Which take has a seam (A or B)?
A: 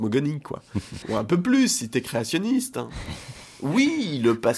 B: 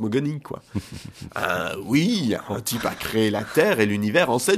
A